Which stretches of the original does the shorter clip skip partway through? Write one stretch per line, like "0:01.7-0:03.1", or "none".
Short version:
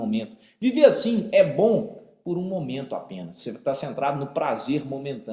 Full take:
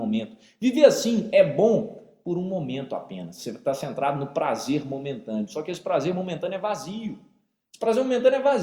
none